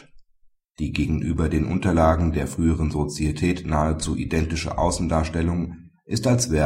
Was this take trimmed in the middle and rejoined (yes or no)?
no